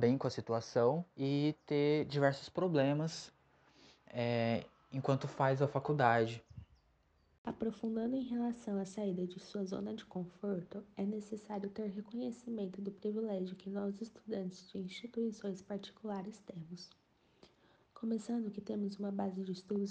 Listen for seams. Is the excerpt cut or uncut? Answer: cut